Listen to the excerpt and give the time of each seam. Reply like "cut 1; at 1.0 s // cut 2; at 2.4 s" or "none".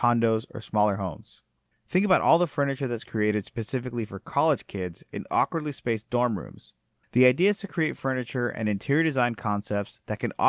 cut 1; at 1.7 s // cut 2; at 7.0 s